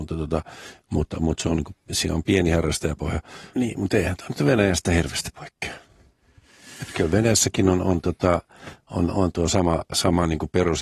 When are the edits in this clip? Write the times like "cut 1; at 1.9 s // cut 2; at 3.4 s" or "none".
cut 1; at 3.5 s